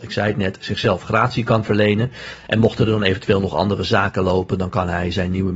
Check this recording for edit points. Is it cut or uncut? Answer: uncut